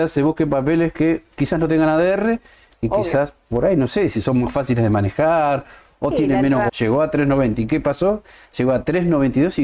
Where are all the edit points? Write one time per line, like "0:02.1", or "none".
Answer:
0:06.7